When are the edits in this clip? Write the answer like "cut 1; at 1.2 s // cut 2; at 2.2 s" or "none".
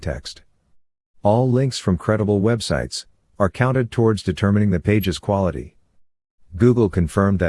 cut 1; at 3.3 s